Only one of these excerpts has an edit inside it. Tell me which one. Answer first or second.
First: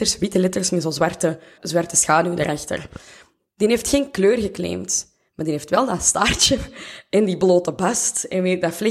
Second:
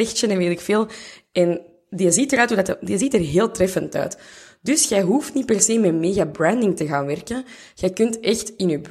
first